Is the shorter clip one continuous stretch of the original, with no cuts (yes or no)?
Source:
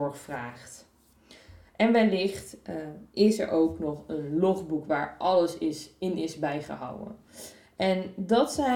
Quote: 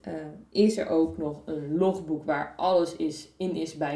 yes